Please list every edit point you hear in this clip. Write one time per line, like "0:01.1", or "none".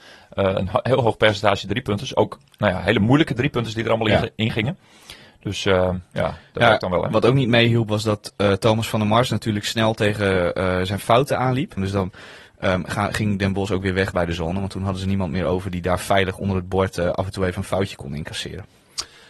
0:11.8